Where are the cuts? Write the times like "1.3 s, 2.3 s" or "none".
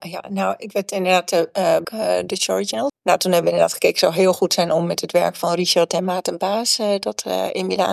1.8 s, 2.9 s